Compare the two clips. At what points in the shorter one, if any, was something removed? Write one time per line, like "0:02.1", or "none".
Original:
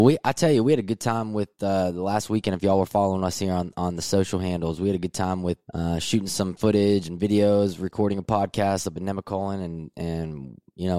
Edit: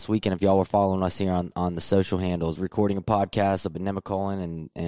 0:02.6